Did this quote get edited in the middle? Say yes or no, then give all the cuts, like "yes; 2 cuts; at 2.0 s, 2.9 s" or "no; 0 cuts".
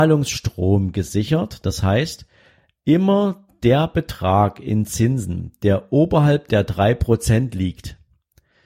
no; 0 cuts